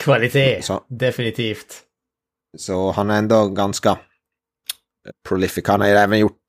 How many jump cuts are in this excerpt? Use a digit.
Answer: 1